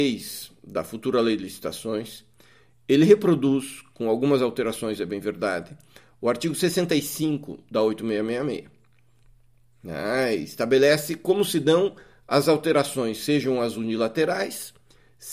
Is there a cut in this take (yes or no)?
no